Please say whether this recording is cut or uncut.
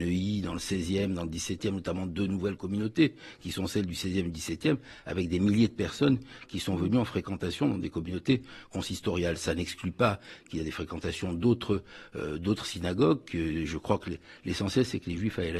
uncut